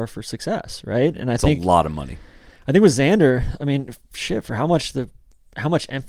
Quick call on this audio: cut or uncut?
uncut